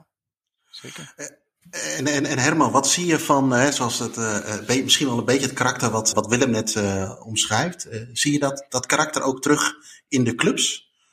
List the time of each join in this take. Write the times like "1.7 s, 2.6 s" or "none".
6.1 s